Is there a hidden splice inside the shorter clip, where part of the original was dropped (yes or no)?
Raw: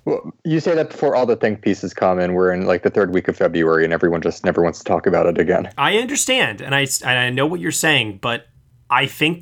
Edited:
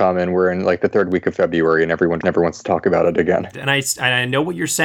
yes